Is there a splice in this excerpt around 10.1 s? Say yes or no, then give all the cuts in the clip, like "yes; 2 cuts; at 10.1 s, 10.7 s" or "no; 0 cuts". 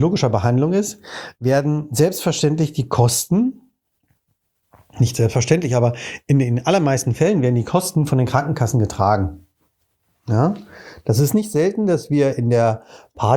yes; 1 cut; at 10.1 s